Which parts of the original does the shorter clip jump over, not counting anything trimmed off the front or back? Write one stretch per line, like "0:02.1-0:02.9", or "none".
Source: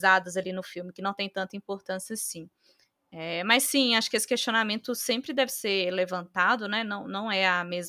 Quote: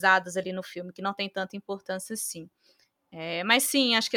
none